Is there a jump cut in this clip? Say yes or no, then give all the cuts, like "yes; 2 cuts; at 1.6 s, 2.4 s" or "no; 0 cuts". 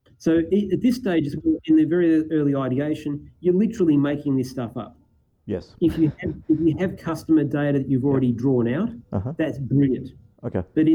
no; 0 cuts